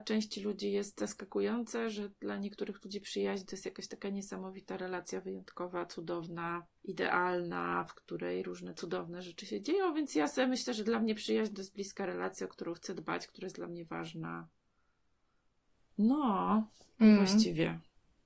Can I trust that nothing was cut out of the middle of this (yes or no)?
yes